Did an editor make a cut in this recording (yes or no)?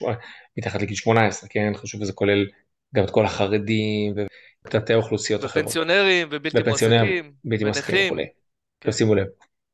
no